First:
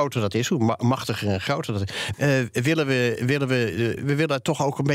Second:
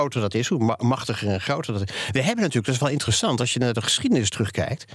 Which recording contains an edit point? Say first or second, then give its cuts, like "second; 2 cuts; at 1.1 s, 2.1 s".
first; 2 cuts; at 2.1 s, 4.0 s